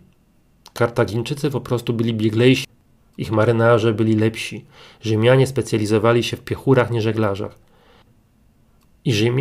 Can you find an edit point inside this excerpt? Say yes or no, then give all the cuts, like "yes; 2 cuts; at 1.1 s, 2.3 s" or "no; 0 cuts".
no; 0 cuts